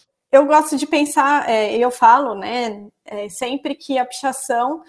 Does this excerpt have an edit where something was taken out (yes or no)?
no